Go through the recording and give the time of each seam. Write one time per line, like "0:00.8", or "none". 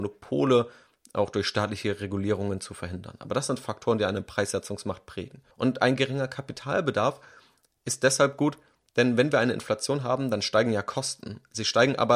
0:05.5